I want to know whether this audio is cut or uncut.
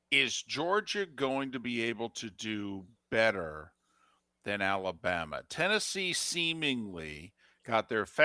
uncut